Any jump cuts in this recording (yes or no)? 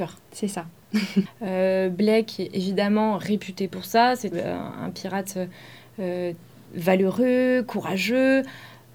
yes